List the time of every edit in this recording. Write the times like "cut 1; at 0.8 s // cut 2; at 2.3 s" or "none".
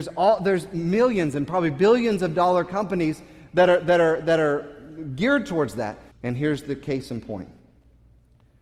cut 1; at 6.1 s